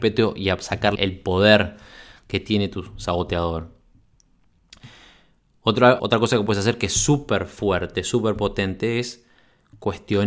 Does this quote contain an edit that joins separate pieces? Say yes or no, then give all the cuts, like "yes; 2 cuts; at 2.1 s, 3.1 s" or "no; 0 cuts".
yes; 2 cuts; at 1.0 s, 6.0 s